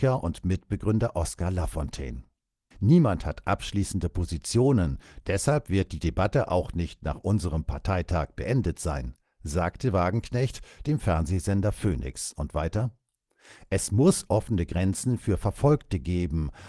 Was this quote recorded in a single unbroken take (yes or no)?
no